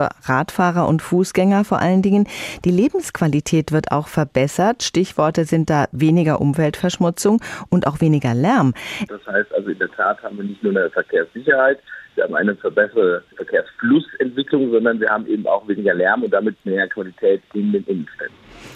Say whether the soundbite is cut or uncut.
cut